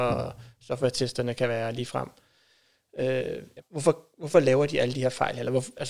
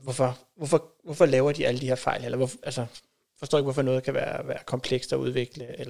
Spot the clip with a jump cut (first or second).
first